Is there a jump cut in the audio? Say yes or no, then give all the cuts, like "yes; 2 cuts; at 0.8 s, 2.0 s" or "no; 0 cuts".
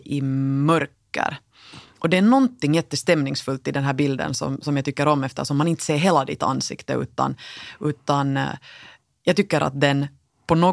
no; 0 cuts